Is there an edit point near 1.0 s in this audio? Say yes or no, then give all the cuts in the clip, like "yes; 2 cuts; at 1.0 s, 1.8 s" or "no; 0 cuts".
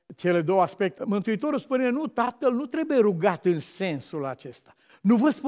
yes; 1 cut; at 1.0 s